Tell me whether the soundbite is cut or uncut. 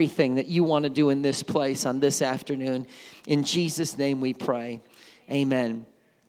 uncut